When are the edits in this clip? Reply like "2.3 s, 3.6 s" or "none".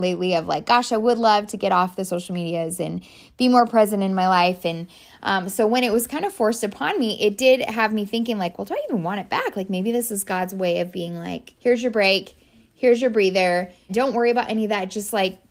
11.6 s, 13.9 s